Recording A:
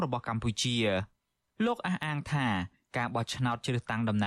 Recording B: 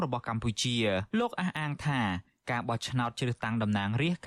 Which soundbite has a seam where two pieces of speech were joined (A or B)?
B